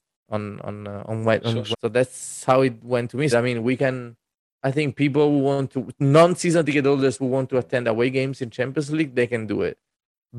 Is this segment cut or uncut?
cut